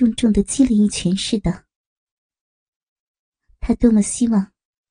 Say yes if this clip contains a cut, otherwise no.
no